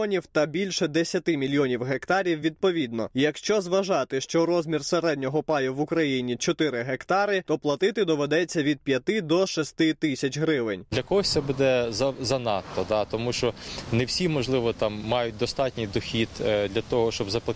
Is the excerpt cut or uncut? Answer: uncut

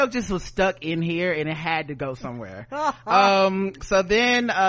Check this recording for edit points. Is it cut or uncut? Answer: uncut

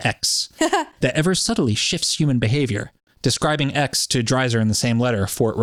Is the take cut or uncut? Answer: cut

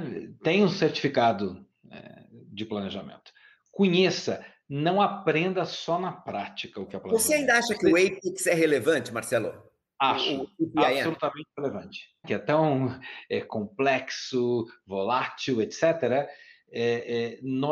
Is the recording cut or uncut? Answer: cut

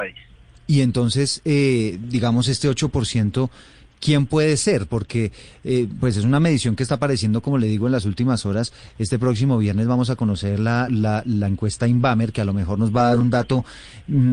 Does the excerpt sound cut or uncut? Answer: cut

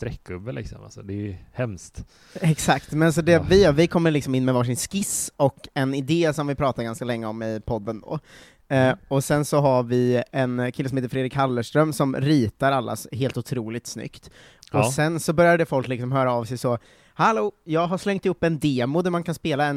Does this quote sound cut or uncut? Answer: uncut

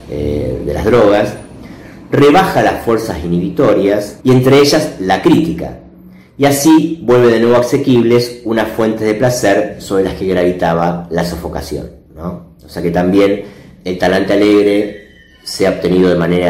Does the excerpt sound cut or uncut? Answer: cut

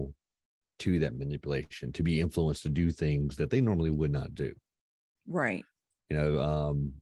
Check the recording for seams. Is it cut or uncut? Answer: uncut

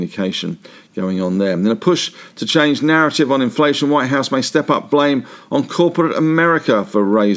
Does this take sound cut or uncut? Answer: uncut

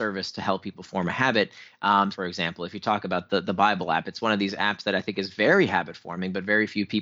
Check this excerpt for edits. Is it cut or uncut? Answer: cut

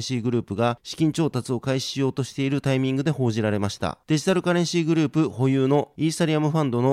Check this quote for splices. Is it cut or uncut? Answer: uncut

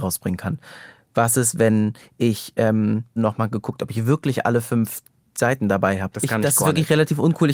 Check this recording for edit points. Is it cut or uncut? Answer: cut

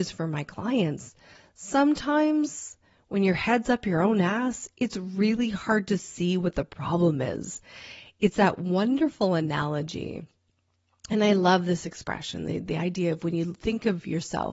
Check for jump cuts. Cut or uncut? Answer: uncut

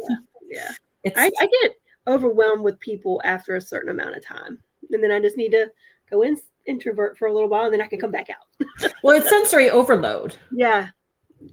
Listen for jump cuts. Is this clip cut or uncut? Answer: uncut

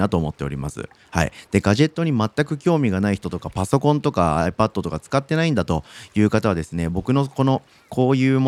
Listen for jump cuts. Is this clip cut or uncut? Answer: uncut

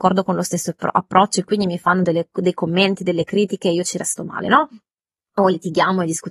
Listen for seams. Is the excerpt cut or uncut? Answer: uncut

